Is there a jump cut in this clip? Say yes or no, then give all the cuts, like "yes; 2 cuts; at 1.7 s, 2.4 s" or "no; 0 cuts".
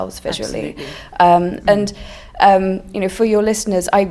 yes; 1 cut; at 1.6 s